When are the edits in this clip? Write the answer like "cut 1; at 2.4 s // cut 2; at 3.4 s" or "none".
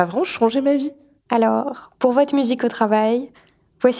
cut 1; at 1.2 s